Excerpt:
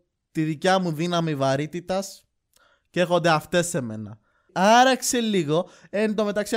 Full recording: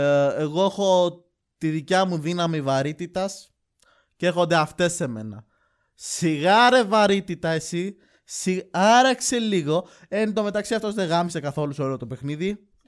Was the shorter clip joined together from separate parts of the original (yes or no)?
yes